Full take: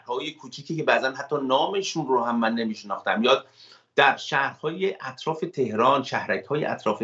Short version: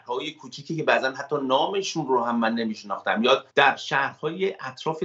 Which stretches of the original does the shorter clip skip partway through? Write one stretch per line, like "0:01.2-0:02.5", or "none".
0:03.5-0:03.9